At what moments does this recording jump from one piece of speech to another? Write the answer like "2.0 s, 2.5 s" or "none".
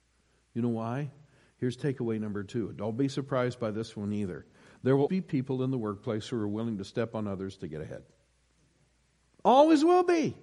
5.1 s